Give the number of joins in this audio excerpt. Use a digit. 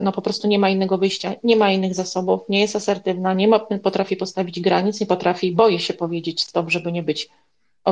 0